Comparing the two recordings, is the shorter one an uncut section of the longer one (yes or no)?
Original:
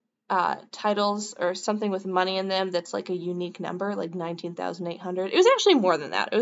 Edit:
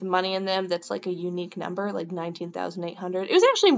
yes